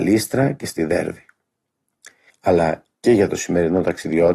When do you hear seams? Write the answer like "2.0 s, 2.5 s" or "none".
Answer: 2.3 s

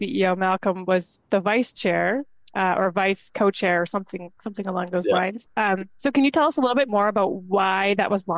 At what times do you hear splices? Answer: 5.9 s

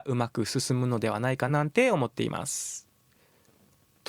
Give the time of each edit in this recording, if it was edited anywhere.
1.5 s

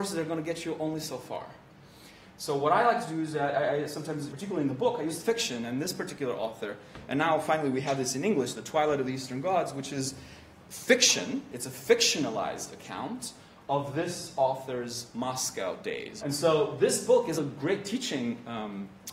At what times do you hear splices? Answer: 4.3 s, 16.2 s, 17.4 s

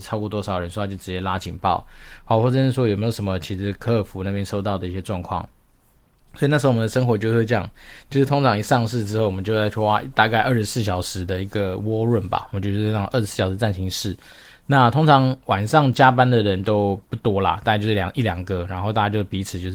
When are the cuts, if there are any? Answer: none

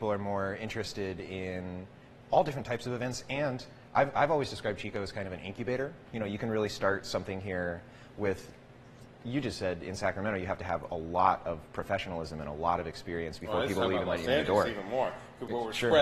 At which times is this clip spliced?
none

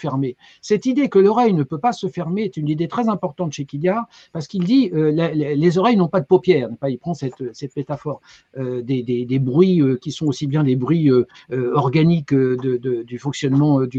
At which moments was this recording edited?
8.4 s

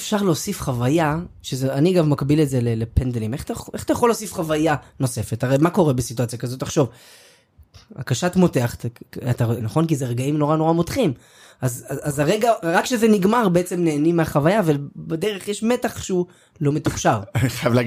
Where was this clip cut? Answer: 9.6 s

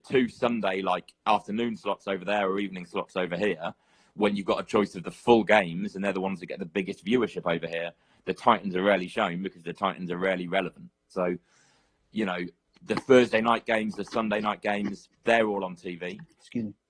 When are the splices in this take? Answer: 11.1 s, 15.2 s

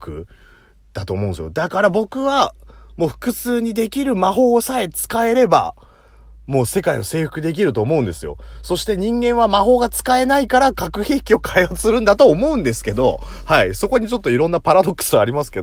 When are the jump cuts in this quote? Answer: none

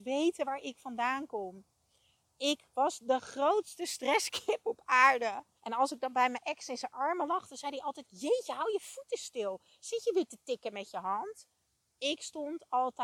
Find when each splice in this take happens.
5.6 s

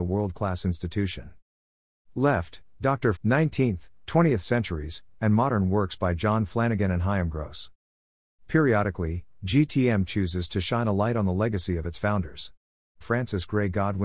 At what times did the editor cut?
3.2 s, 13.0 s

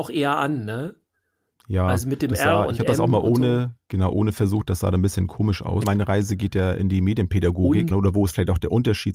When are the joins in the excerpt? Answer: 3.8 s, 5.8 s, 7.9 s

